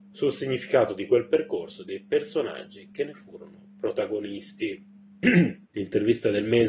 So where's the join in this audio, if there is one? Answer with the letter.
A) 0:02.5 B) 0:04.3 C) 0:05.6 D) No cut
C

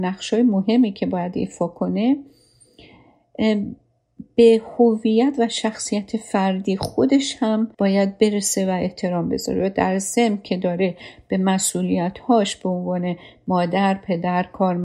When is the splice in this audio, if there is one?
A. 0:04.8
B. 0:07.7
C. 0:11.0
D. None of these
B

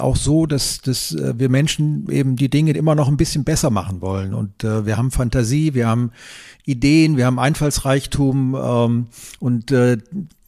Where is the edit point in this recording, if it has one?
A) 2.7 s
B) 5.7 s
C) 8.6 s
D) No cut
A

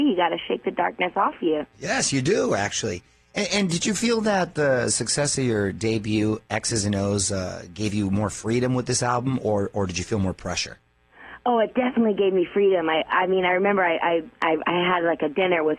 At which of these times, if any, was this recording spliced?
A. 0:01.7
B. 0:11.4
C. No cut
A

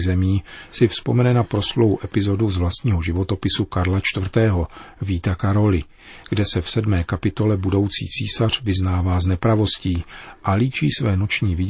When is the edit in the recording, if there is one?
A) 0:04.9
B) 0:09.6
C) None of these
C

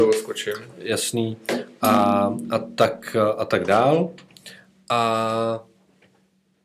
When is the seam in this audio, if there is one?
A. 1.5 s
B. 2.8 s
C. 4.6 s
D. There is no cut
D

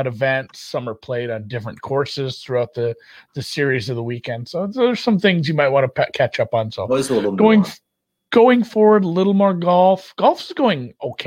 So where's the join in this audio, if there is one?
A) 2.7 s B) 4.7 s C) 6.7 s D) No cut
D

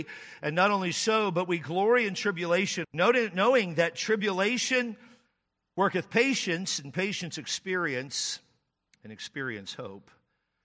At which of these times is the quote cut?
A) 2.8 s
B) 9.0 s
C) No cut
A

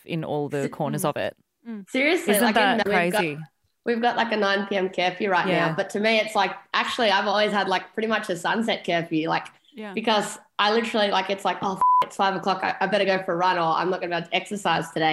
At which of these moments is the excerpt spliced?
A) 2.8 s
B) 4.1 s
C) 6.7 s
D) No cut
A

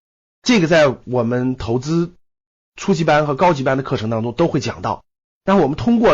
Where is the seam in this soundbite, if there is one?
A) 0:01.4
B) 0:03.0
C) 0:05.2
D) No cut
D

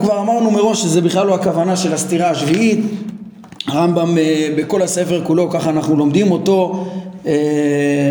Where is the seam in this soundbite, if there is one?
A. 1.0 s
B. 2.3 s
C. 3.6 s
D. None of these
D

